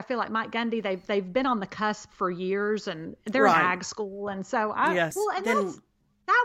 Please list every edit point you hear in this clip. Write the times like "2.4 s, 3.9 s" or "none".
5.1 s